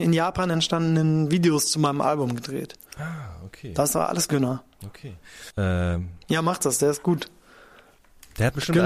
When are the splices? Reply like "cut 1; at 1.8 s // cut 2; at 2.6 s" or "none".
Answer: cut 1; at 5.5 s